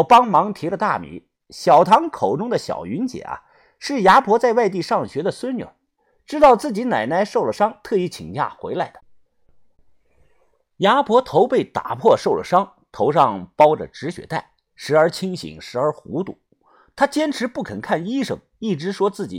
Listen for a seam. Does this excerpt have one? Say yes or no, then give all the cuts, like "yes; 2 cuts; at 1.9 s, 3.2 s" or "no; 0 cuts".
no; 0 cuts